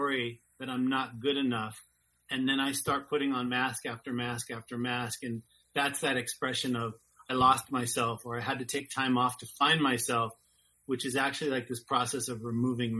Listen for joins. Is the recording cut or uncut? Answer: uncut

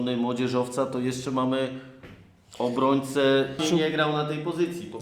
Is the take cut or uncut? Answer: cut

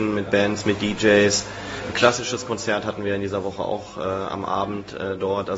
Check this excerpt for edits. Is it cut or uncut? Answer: uncut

